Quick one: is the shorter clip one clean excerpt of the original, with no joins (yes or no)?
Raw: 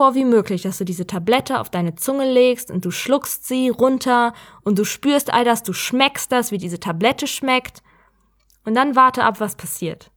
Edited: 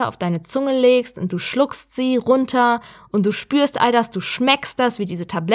yes